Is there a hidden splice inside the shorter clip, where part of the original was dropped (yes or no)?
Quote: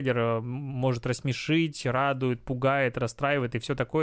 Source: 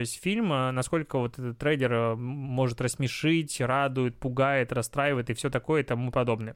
no